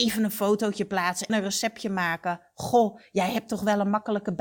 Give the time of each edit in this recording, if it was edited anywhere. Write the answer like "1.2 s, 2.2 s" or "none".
1.3 s